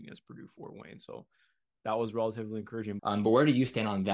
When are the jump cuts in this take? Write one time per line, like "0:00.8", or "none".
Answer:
0:03.0